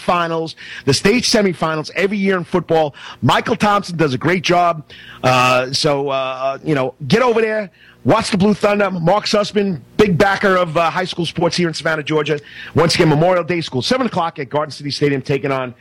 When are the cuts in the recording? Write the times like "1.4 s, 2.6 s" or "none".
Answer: none

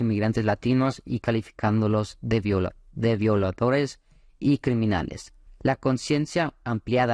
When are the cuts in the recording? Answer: 5.5 s

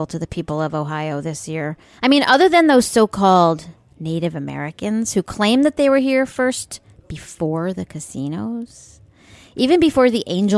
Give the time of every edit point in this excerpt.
2.0 s

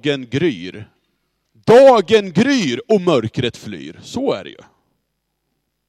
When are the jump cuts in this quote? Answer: 1.4 s

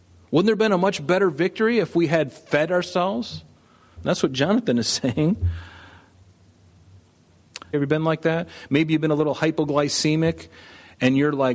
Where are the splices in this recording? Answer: 4.0 s, 7.7 s

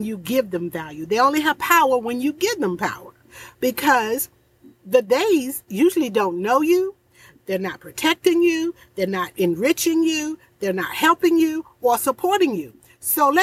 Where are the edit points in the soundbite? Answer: 7.4 s

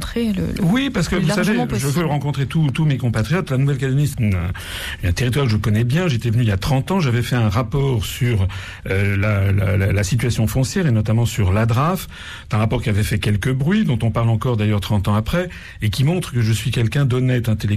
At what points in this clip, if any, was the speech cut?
4.1 s

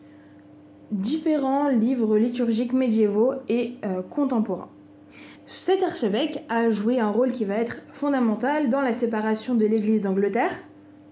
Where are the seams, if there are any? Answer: 5.4 s

